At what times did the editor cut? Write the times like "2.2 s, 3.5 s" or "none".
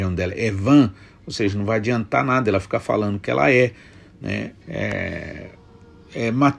4.6 s